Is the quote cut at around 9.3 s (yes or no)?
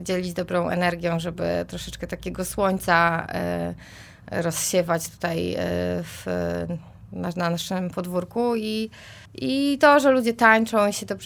yes